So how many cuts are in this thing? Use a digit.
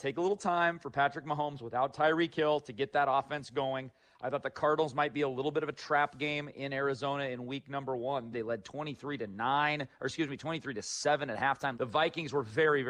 2